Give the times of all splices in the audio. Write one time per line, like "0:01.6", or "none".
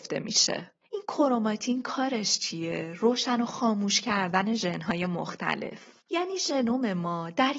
none